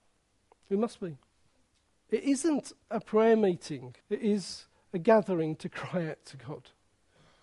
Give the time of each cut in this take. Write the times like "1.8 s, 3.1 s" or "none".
2.0 s, 4.0 s